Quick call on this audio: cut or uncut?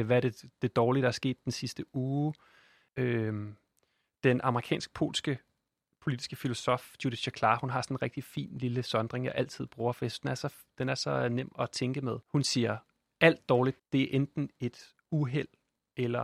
cut